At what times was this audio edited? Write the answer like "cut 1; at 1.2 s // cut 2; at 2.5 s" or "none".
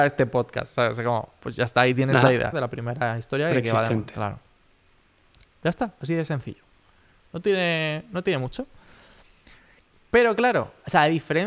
cut 1; at 2.5 s // cut 2; at 5.5 s